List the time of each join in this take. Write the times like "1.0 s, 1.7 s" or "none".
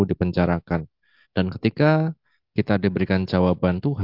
1.2 s